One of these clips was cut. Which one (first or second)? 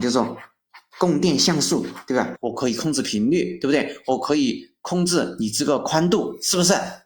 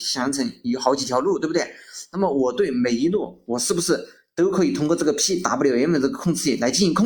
first